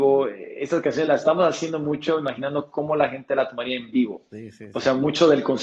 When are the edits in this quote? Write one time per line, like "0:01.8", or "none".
none